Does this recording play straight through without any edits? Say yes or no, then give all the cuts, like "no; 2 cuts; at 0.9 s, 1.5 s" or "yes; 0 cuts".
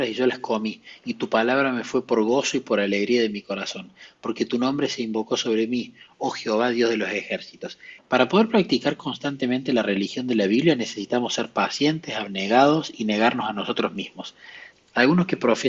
no; 2 cuts; at 8.0 s, 14.7 s